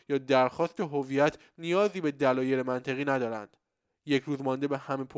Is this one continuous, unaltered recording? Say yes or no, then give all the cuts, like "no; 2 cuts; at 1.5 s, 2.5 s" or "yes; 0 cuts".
yes; 0 cuts